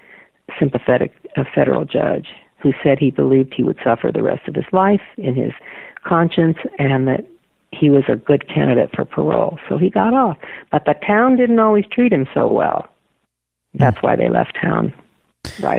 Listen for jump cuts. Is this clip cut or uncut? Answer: uncut